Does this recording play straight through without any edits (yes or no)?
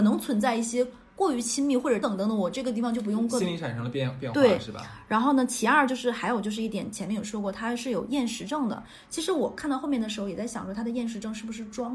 no